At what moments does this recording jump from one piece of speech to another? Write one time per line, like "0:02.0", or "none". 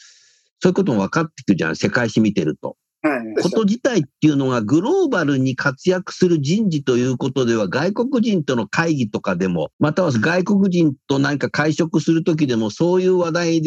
0:03.4
0:09.7